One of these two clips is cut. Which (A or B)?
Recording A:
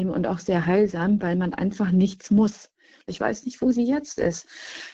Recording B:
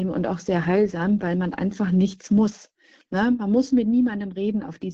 A